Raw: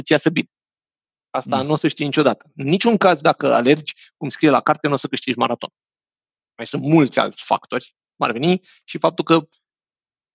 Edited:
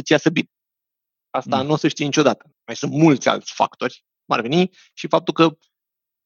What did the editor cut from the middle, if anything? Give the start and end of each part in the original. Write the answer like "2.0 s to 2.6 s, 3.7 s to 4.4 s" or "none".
2.5 s to 6.4 s